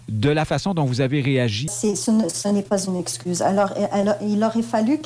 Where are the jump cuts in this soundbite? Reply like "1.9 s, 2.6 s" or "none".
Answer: 1.7 s